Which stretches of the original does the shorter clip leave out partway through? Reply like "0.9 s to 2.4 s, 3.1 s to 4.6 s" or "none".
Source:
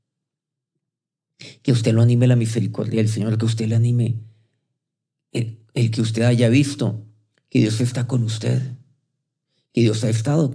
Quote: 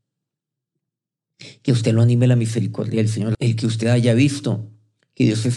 3.3 s to 5.7 s

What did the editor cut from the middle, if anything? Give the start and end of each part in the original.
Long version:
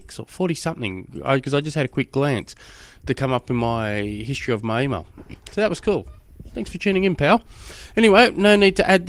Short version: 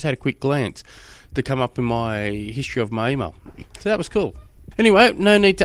6.4 s to 7.9 s

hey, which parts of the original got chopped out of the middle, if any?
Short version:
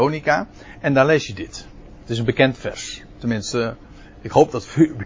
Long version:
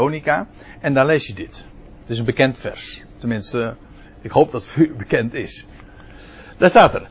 none

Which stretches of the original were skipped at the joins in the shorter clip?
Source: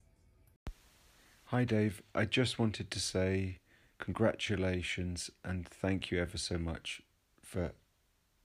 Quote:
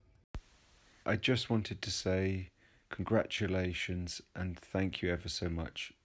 1.3 s to 2.1 s

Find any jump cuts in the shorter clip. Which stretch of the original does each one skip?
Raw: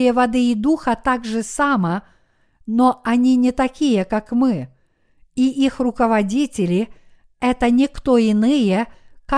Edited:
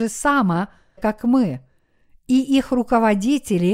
2.3 s to 4.1 s

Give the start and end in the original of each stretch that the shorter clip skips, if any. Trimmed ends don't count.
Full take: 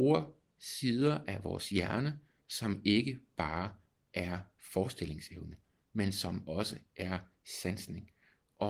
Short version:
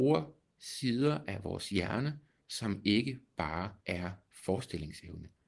3.8 s to 4.1 s

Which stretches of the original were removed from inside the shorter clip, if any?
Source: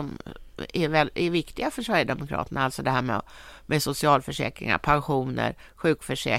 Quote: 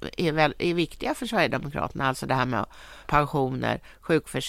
3.6 s to 4.8 s

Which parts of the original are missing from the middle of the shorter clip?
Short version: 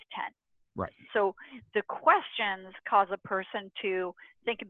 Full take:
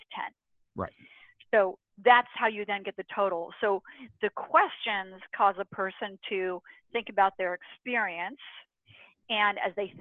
1.1 s to 3.6 s

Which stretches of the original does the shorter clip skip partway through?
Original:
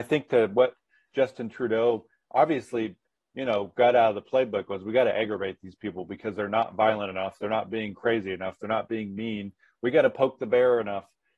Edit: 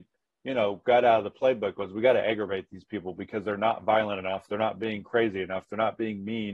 none

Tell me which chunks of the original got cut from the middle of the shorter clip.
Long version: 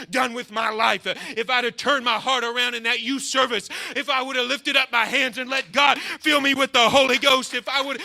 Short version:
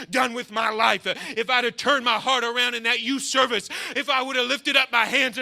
none

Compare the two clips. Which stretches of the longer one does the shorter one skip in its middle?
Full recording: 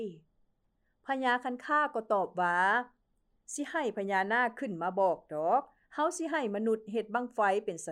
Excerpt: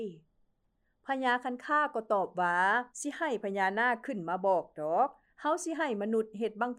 2.9 s to 3.4 s

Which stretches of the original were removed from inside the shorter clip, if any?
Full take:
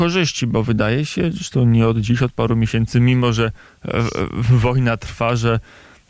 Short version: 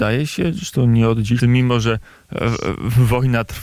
2.2 s to 2.9 s

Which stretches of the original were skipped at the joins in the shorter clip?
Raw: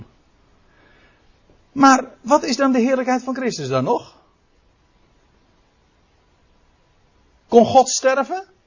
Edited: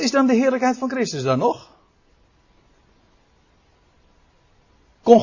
none

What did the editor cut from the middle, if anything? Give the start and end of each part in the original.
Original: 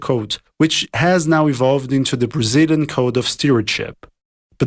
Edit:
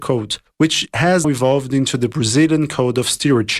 1.2 s to 1.4 s

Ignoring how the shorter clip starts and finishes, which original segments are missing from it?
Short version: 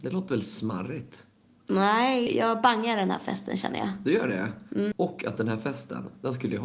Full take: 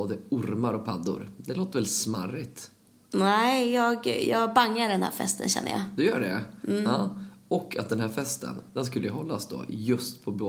3.7 s to 4.2 s, 6.8 s to 7.4 s

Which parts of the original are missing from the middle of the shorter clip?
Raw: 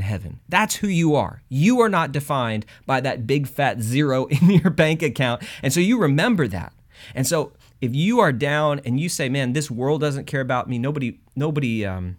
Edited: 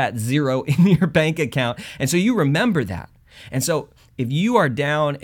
none

